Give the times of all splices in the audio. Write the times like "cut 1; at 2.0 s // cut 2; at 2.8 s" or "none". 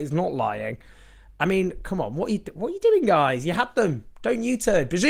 none